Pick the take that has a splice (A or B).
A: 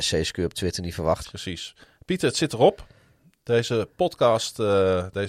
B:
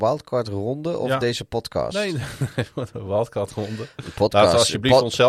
A